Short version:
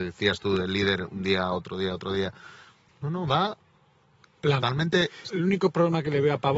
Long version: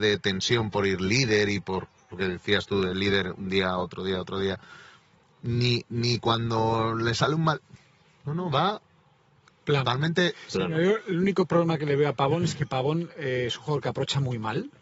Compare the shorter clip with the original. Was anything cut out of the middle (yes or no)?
yes